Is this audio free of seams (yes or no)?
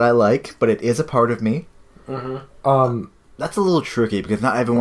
no